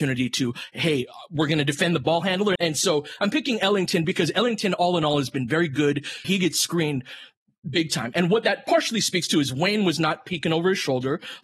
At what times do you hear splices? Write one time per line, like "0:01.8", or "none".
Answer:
0:02.6
0:06.2